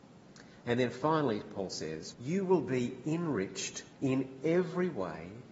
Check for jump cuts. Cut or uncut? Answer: cut